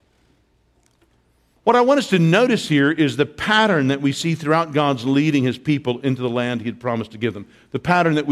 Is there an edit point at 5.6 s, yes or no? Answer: no